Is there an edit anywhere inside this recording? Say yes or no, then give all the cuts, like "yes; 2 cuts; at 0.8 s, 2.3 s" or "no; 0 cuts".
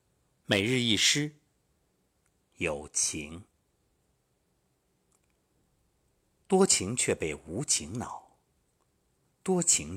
no; 0 cuts